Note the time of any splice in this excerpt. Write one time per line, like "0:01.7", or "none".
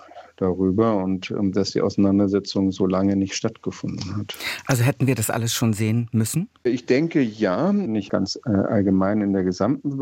0:06.6
0:07.9